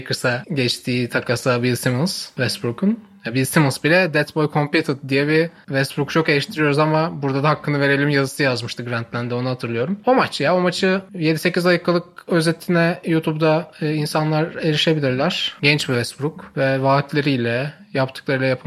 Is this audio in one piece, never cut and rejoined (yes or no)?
yes